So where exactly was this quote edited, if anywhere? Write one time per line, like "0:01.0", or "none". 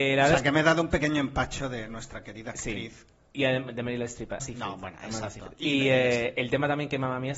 0:03.3
0:04.4